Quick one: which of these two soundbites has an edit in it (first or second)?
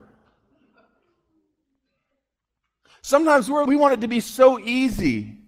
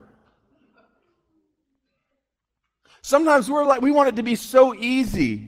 first